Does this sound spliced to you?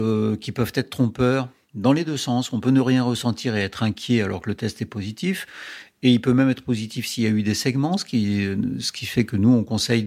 no; 0 cuts

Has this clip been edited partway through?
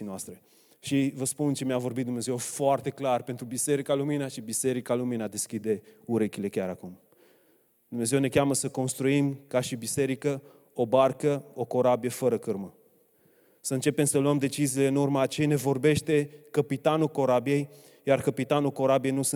no; 0 cuts

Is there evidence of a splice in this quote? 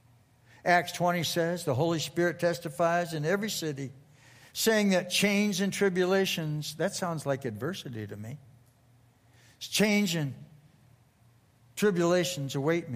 no; 0 cuts

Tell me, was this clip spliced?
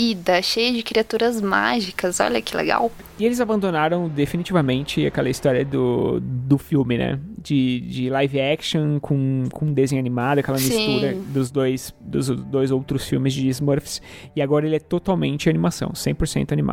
no; 0 cuts

